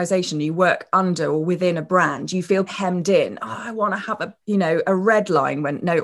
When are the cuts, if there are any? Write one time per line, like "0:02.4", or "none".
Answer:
0:02.7
0:04.4